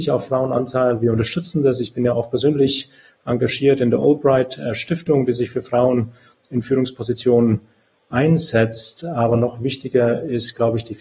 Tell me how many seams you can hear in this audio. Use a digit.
0